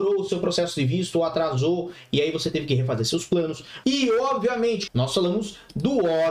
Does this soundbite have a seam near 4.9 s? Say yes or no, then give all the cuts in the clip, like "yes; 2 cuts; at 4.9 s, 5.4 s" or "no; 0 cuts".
yes; 2 cuts; at 3.8 s, 4.9 s